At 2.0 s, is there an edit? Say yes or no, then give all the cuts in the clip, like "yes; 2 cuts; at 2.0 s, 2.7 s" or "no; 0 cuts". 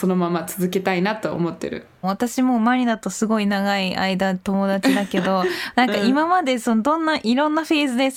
yes; 1 cut; at 2.0 s